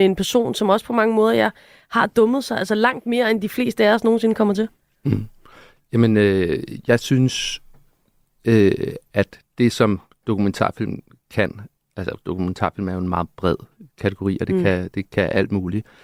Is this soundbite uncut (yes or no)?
yes